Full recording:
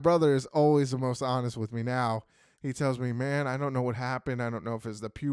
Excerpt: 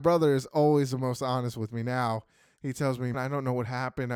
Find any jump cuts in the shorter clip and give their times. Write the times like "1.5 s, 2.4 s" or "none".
3.1 s